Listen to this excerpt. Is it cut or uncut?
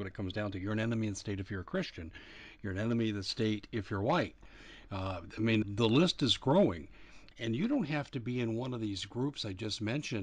cut